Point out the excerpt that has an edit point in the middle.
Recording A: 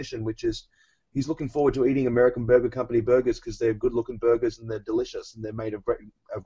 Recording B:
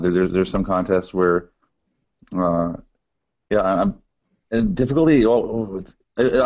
B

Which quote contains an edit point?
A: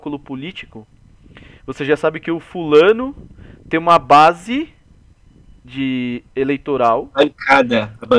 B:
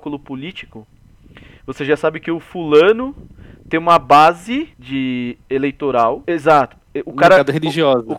B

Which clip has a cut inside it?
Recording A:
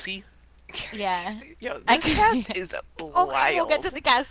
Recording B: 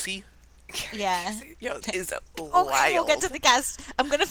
B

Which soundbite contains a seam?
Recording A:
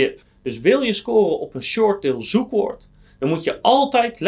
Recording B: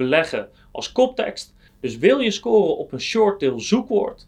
B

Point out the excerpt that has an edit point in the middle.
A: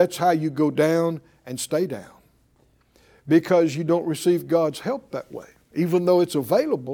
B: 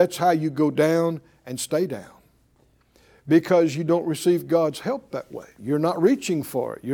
B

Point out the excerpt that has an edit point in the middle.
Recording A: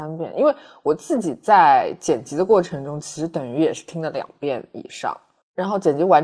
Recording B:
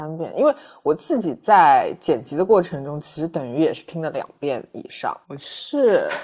B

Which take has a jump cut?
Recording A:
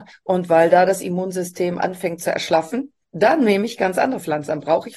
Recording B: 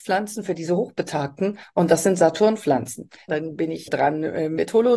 B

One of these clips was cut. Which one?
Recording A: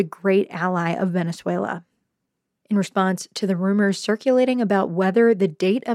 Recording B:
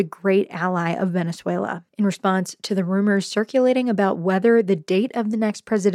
B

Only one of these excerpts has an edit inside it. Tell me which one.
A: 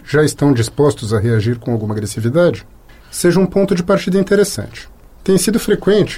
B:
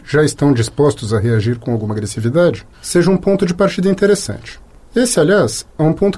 B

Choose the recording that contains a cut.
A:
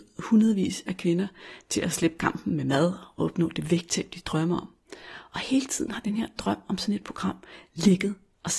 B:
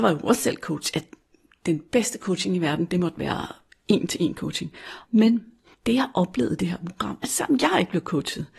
B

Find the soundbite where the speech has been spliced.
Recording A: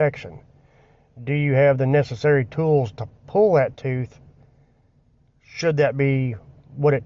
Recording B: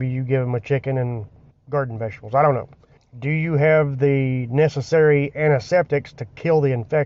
B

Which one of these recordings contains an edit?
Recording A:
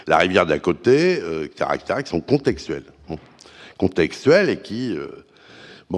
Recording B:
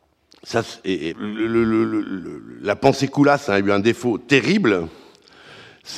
B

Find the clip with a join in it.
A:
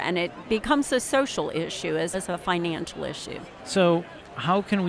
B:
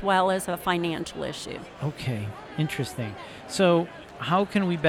A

